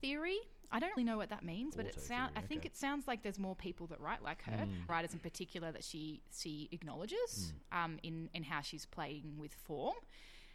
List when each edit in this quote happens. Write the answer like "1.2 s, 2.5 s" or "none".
1.0 s, 4.9 s